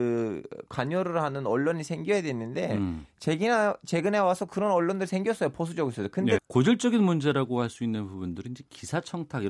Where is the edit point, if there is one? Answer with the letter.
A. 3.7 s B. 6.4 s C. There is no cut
B